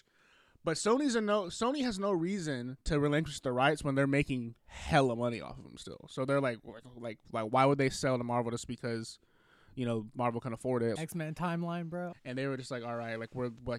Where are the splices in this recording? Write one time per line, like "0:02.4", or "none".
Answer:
0:11.0
0:12.1